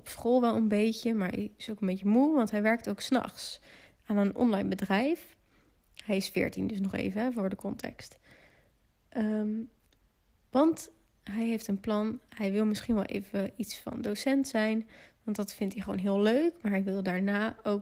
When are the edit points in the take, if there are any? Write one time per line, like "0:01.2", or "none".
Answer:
none